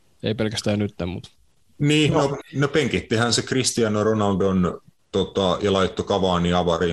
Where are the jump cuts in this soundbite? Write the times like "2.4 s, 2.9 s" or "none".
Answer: 2.4 s